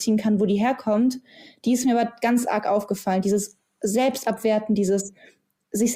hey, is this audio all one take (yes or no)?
yes